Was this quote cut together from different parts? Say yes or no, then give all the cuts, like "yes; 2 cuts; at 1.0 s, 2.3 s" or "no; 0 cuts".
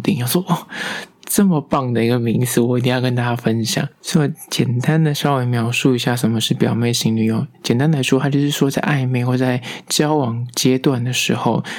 no; 0 cuts